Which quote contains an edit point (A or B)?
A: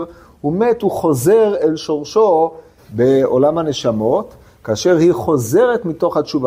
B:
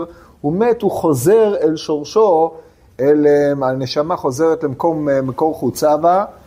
A